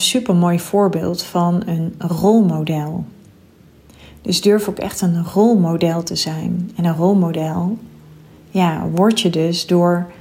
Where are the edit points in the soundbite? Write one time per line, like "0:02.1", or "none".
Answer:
none